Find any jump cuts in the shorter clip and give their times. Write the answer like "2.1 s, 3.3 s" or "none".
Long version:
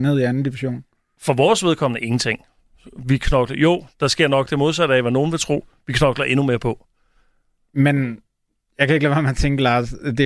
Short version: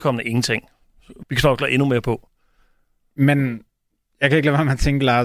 1.2 s